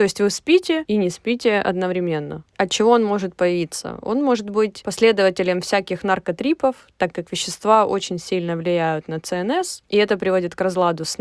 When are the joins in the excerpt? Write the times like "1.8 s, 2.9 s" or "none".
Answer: none